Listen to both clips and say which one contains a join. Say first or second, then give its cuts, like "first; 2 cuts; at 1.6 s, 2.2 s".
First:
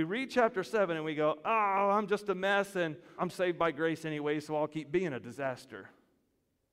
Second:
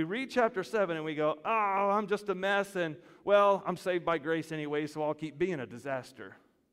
first; 1 cut; at 3.2 s